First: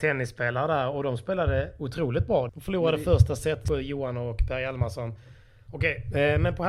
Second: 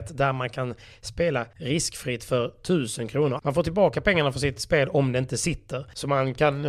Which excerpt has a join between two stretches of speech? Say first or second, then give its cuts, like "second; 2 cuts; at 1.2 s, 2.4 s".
first; 3 cuts; at 2.5 s, 3.6 s, 5.7 s